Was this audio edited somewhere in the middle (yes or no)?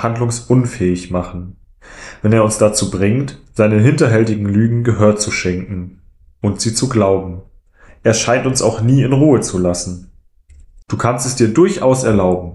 yes